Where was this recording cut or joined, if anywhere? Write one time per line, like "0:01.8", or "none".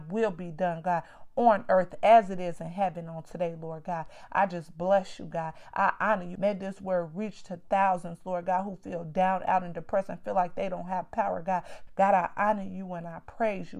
0:06.3
0:11.9